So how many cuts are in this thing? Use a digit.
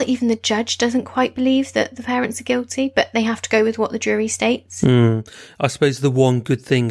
0